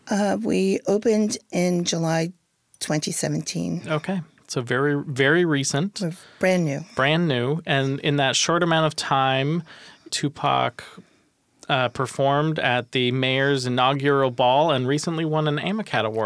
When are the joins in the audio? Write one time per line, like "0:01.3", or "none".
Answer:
0:10.1